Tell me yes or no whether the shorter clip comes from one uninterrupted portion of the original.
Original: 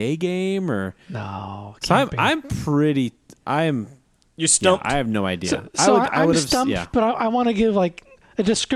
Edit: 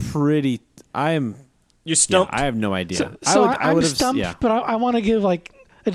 yes